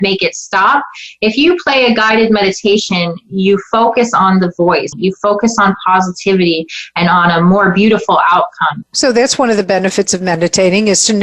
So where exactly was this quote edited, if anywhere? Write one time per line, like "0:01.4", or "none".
0:04.9
0:08.8